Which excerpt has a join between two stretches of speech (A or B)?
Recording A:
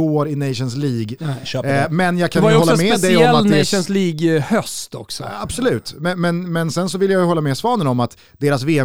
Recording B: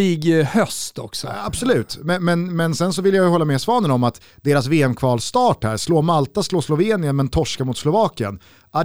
A